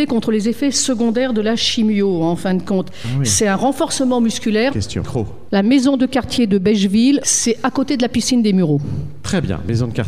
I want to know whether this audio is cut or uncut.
cut